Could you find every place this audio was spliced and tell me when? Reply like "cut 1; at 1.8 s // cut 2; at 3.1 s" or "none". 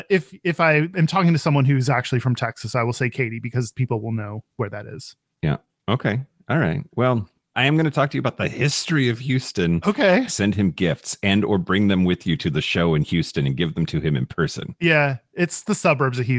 cut 1; at 7.5 s // cut 2; at 10.3 s // cut 3; at 14.8 s